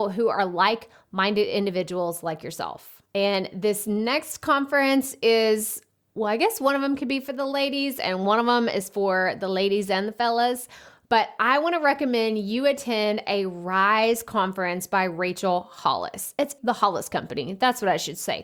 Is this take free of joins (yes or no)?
no